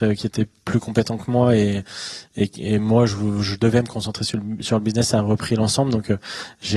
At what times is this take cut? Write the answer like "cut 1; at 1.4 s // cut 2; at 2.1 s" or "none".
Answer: none